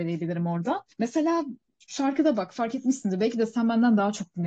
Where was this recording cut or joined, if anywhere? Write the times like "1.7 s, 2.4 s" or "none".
0.9 s